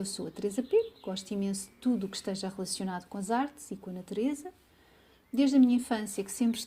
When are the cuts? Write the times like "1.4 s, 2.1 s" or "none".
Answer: none